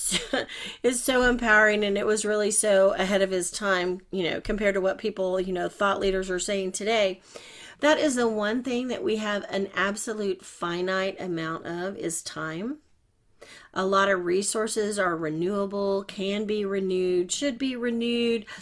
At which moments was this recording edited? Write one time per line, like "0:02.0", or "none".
0:07.7